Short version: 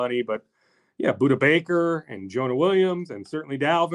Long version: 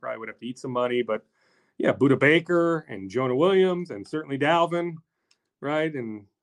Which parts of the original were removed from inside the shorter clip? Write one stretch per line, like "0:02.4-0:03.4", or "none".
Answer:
none